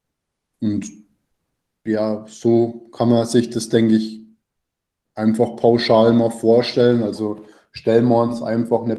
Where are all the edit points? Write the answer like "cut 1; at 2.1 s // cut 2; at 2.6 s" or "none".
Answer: none